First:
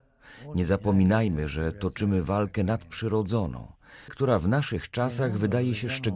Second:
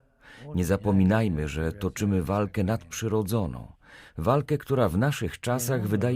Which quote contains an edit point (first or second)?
first